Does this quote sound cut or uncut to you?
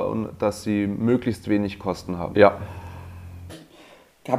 cut